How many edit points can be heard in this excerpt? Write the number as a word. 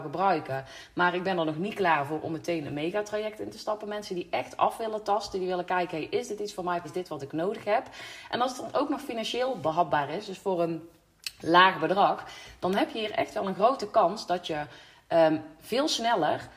one